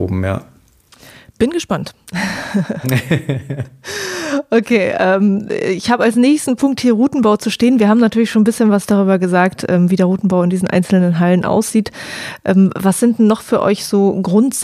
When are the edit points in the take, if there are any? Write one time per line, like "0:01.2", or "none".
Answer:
none